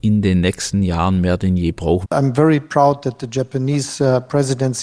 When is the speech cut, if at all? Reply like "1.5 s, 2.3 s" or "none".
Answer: 2.0 s

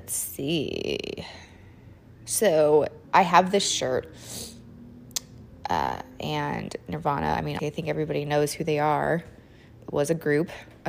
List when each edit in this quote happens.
3.0 s, 5.5 s, 7.6 s

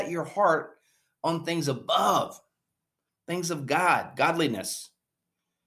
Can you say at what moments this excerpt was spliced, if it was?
3.1 s

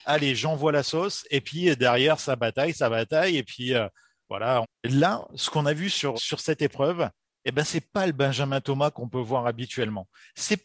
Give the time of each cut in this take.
4.6 s, 6.1 s

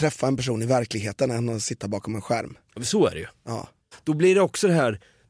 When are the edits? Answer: 3.9 s

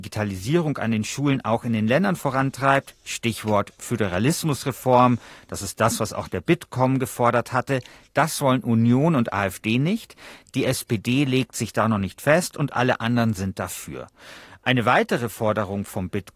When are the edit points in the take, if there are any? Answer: none

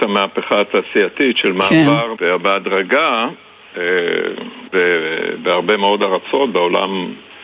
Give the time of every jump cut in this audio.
2.1 s, 4.7 s

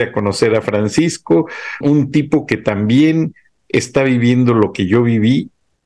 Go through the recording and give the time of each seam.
1.8 s

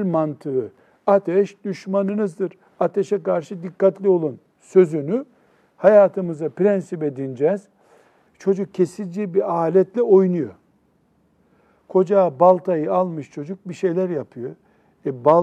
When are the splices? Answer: 8.3 s

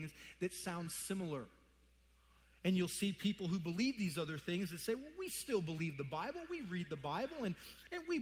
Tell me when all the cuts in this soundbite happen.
none

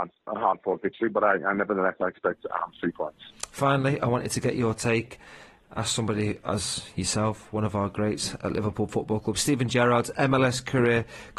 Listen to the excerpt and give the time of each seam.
none

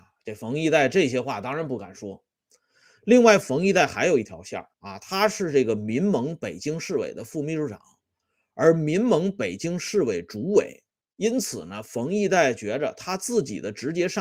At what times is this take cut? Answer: 4.7 s, 11.0 s

